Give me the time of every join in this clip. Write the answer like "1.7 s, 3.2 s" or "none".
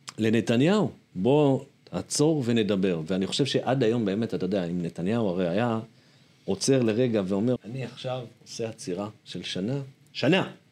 7.6 s